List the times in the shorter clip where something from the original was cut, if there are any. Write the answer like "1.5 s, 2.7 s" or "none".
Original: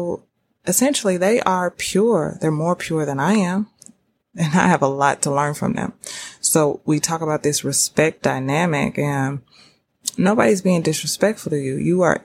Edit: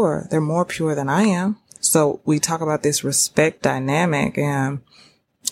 1.8 s